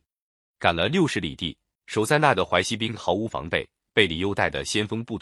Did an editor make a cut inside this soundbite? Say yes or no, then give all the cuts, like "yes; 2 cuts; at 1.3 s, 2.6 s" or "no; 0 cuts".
yes; 1 cut; at 1.7 s